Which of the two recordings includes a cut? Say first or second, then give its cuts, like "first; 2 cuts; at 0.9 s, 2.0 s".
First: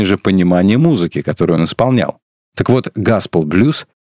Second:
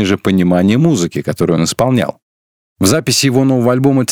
first; 1 cut; at 2.5 s